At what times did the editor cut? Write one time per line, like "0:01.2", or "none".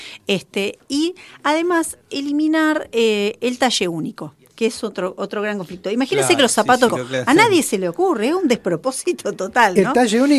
0:06.9